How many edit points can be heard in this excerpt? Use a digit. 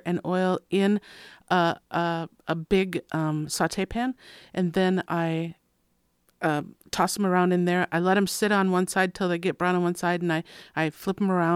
1